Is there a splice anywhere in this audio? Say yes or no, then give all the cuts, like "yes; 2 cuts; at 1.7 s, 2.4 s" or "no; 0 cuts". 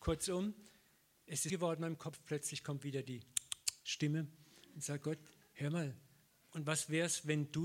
yes; 1 cut; at 1.5 s